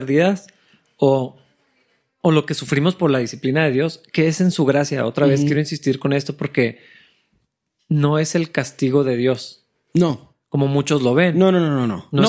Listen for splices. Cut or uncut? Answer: uncut